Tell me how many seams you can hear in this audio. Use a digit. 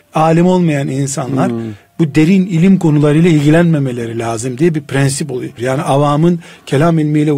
1